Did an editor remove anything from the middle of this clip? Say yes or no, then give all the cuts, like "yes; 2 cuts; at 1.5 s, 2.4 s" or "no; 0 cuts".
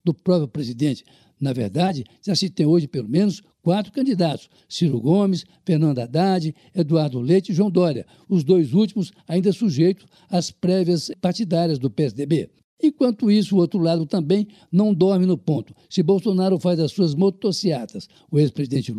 no; 0 cuts